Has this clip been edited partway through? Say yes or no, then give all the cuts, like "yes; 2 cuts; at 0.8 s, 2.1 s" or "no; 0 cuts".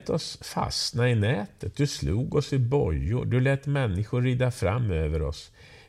no; 0 cuts